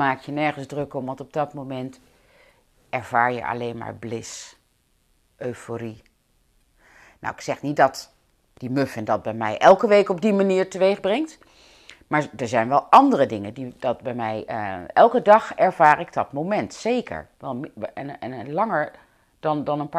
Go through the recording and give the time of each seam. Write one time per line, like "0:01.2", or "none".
none